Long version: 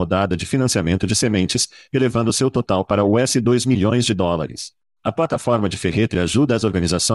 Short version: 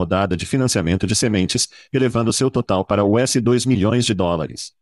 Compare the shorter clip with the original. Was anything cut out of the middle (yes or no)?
no